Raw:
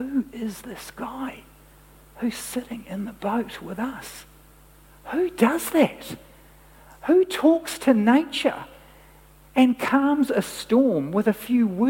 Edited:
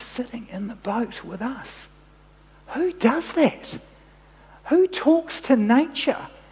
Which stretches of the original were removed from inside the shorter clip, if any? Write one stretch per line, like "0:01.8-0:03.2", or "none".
none